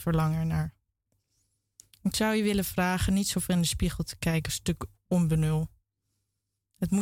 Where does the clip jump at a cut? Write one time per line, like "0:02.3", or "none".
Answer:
none